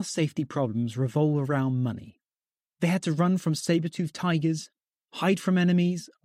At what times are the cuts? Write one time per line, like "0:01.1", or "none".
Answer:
0:02.6